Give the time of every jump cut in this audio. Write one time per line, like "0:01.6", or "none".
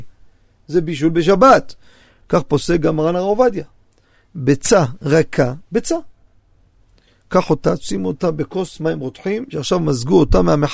none